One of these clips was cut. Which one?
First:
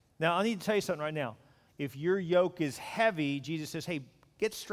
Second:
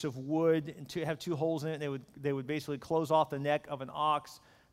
first; 1 cut; at 1.7 s

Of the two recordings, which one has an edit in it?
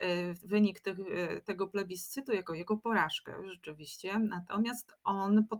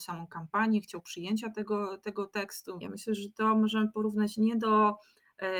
second; 1 cut; at 2.8 s

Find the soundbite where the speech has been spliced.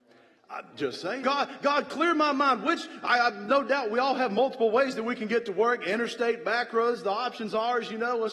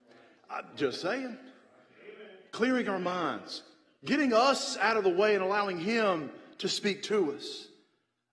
first; 1 cut; at 1.2 s

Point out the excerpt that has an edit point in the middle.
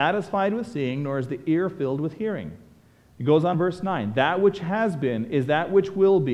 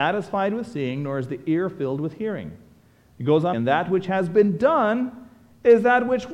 second; 1 cut; at 3.5 s

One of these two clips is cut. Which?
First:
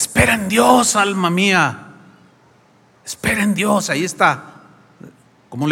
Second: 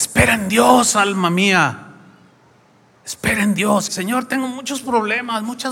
second; 1 cut; at 3.9 s

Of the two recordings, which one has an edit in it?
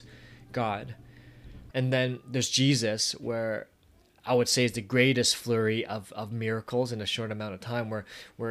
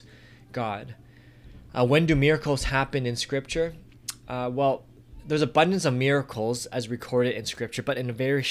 first; 1 cut; at 1.7 s

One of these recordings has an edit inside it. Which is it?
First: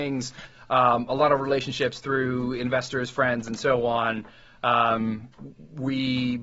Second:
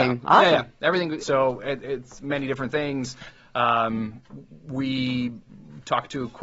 second; 2 cuts; at 1.2 s, 3.4 s

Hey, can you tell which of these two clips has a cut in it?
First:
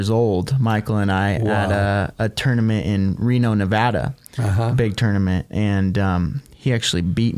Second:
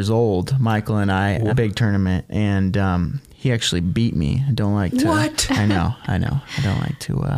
second; 1 cut; at 1.5 s

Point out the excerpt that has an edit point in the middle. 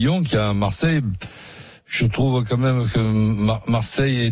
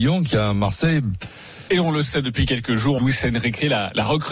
second; 2 cuts; at 1.7 s, 3.0 s

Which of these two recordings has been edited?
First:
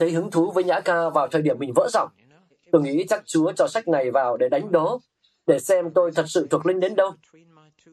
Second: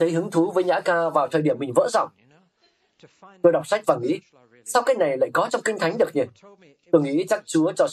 first; 1 cut; at 2.5 s

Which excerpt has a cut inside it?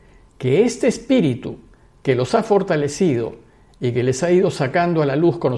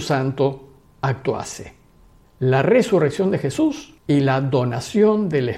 second; 2 cuts; at 2.2 s, 4.0 s

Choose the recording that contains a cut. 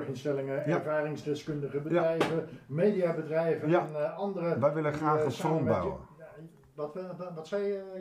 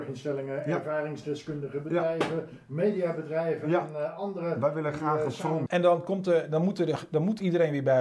second; 1 cut; at 5.7 s

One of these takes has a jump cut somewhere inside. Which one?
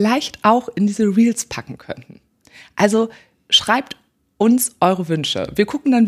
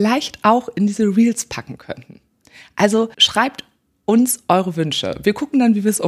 second; 1 cut; at 3.1 s

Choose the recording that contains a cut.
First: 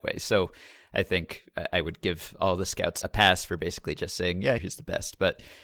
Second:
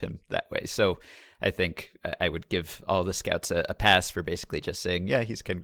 first; 2 cuts; at 3.0 s, 4.6 s

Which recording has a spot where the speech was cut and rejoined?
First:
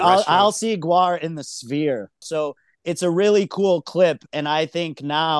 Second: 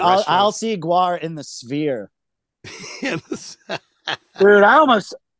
first; 1 cut; at 2.2 s

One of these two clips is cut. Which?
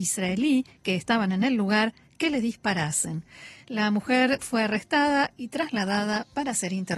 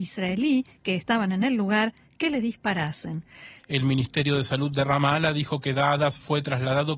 second; 1 cut; at 3.6 s

